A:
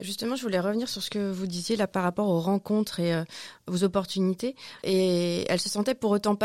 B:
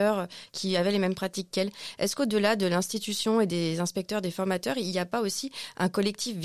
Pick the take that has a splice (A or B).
A